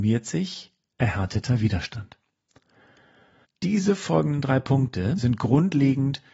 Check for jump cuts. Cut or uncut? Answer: cut